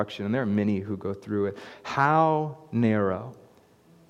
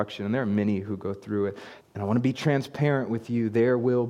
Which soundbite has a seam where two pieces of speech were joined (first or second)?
second